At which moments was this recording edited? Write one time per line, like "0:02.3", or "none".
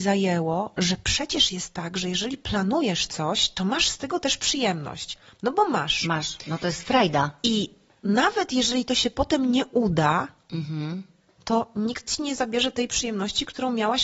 none